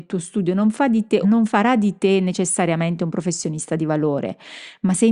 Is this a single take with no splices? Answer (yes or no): no